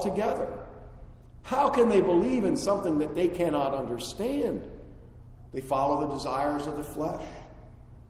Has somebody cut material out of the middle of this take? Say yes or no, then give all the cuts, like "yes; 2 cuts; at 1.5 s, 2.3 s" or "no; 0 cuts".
yes; 1 cut; at 5.5 s